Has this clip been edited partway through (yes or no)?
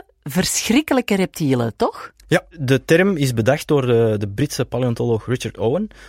yes